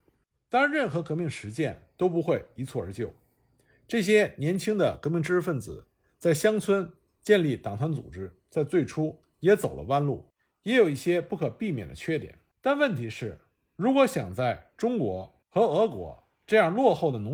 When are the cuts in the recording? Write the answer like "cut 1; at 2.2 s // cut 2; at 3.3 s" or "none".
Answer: cut 1; at 12.5 s